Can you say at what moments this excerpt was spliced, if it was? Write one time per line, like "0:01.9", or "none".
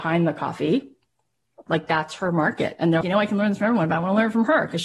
0:01.7
0:03.0